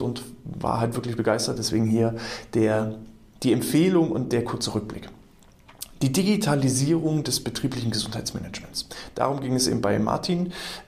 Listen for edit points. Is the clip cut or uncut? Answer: uncut